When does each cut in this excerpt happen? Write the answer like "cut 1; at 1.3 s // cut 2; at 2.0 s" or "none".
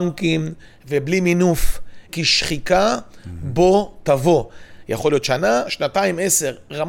cut 1; at 2.1 s

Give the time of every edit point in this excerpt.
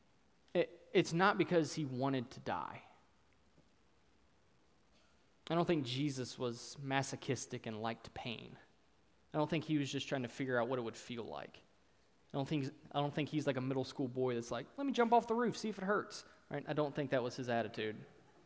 none

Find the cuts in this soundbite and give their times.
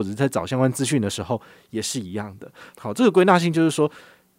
cut 1; at 2.7 s

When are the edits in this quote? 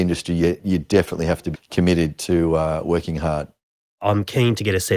cut 1; at 1.5 s

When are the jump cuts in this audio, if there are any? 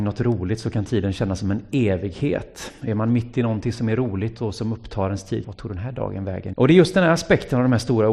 cut 1; at 5.4 s // cut 2; at 6.5 s

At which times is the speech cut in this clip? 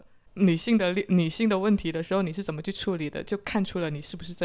none

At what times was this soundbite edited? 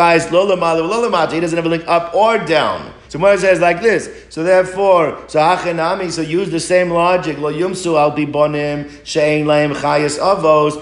cut 1; at 3.1 s

